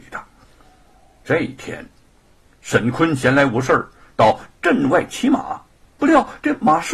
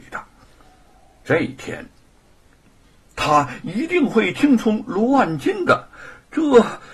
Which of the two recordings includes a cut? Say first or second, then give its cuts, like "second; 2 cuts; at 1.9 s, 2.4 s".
second; 1 cut; at 2.6 s